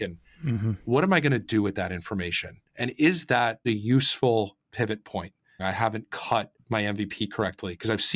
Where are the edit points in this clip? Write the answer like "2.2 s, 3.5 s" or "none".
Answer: 5.6 s